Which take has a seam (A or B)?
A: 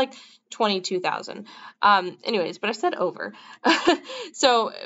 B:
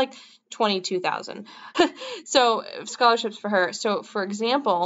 B